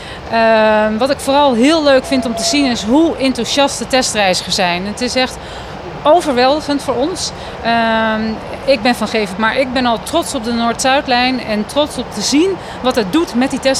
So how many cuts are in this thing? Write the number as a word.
one